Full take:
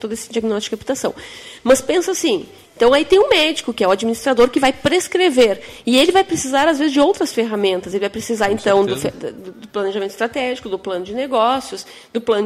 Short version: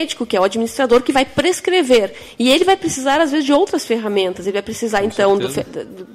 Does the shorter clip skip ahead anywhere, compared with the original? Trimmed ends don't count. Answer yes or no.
no